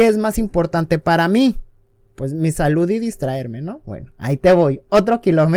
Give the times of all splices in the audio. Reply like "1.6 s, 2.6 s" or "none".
none